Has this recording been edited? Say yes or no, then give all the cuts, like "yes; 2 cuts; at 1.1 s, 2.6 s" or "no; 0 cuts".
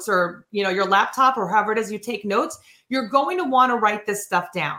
no; 0 cuts